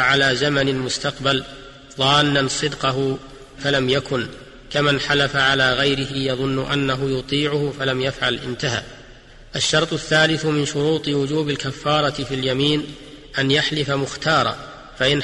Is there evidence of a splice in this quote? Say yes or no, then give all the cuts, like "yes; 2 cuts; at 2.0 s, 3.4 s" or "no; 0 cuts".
yes; 1 cut; at 3.6 s